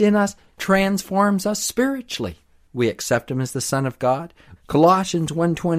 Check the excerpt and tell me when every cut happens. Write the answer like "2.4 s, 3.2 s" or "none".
2.7 s, 4.6 s

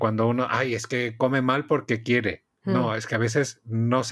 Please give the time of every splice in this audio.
2.5 s

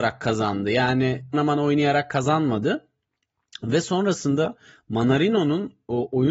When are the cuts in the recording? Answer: 1.3 s

